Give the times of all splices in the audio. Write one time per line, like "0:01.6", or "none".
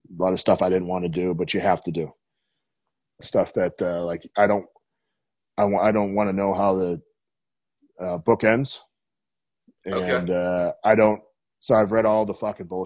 0:03.2
0:11.5